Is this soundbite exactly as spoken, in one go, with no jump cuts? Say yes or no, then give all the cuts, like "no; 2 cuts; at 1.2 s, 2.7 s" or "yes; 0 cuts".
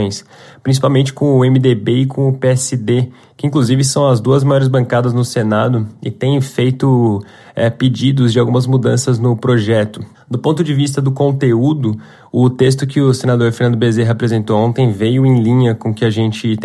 no; 1 cut; at 10.1 s